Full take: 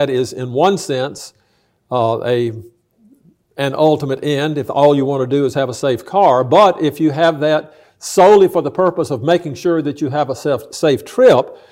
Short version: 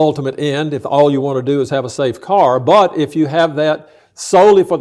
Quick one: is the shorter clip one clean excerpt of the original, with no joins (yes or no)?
yes